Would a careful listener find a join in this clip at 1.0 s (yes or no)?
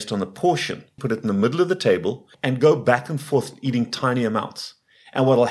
yes